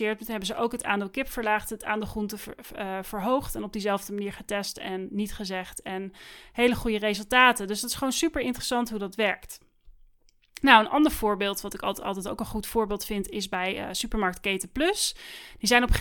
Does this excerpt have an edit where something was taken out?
no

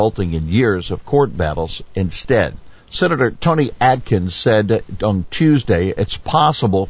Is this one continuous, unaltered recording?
no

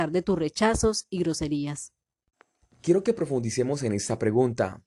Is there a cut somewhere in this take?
no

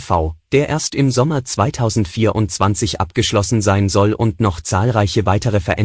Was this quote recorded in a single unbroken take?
yes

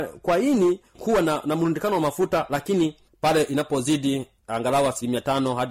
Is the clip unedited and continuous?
yes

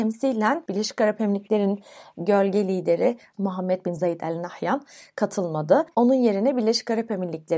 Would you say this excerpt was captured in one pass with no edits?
yes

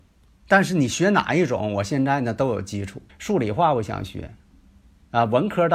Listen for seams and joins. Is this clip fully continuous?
no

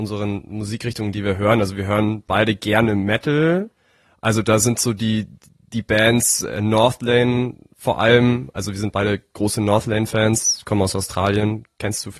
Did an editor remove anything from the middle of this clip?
no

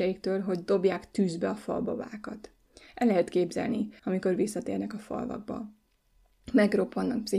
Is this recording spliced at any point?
yes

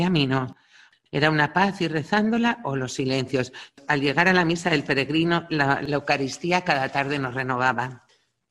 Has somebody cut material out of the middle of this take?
yes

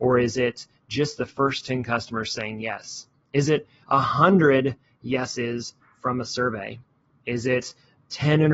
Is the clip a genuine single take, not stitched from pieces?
yes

